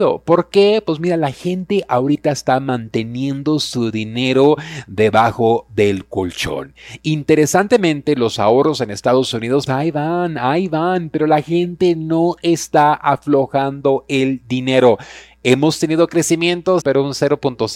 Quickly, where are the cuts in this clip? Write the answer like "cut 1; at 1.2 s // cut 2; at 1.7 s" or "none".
cut 1; at 9.7 s // cut 2; at 16.8 s